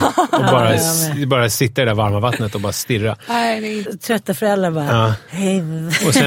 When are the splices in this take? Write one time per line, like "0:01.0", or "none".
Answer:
0:03.9